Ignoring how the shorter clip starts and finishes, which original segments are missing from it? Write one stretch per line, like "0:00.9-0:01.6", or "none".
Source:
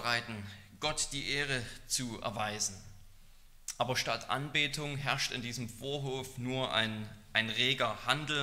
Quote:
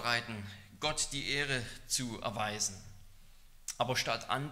none